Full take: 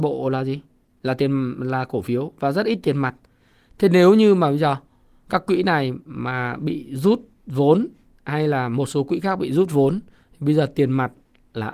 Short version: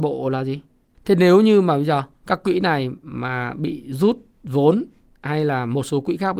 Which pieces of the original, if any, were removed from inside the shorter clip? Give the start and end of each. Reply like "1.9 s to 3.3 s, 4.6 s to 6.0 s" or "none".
0.9 s to 3.7 s, 4.9 s to 5.2 s